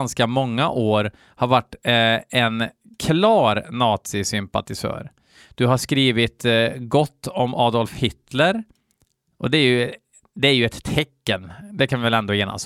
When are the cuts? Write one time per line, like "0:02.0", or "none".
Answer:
none